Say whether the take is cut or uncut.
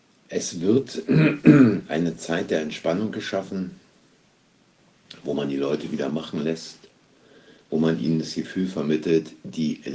uncut